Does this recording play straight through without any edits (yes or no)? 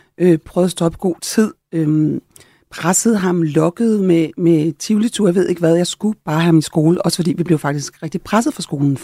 yes